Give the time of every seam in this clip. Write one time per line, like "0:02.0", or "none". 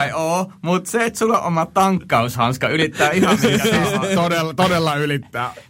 none